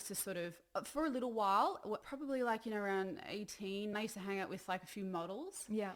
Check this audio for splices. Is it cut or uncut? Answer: cut